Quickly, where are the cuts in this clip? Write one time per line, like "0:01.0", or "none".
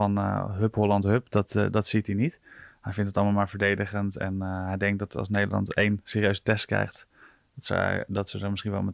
none